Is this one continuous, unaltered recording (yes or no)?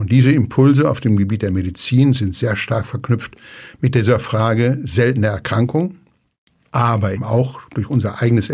no